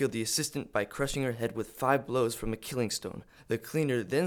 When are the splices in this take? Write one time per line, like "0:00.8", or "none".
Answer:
0:03.4